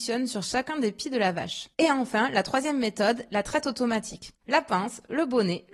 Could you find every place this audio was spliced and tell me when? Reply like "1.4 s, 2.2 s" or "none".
1.7 s, 4.4 s